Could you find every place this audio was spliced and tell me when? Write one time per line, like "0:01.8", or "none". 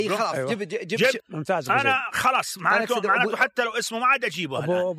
0:01.2